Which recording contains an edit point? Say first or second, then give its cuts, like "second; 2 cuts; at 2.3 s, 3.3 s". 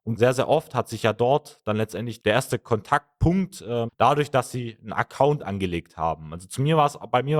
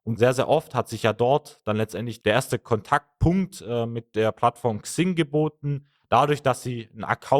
first; 1 cut; at 3.9 s